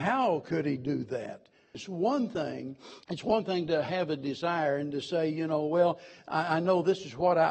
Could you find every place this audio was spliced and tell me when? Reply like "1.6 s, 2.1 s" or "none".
1.7 s, 3.0 s